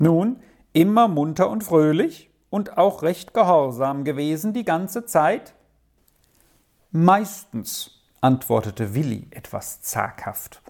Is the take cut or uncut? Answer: uncut